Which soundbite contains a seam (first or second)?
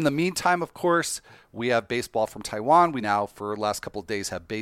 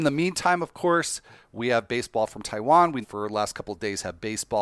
second